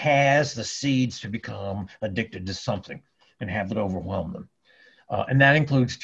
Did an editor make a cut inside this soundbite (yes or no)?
no